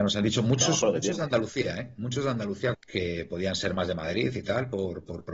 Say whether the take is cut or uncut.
cut